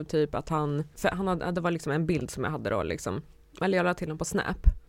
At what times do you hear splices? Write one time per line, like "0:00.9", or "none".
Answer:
none